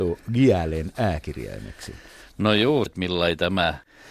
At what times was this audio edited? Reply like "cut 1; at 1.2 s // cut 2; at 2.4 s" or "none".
cut 1; at 2.9 s